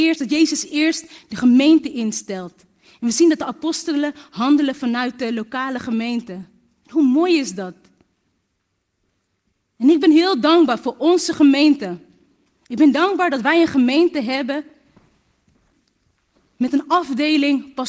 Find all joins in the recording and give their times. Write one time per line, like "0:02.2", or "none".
none